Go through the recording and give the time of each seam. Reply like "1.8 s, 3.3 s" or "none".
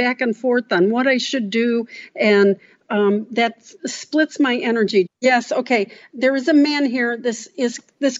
5.1 s